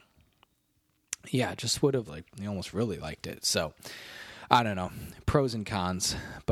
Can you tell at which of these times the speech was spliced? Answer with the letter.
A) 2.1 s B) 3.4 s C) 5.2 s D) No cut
A